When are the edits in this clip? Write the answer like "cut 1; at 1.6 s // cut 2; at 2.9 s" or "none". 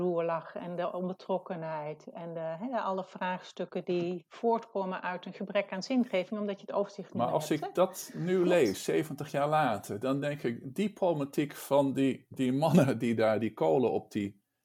none